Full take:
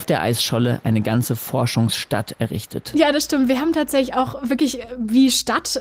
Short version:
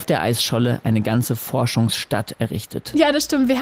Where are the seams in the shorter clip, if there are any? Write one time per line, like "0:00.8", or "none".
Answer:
none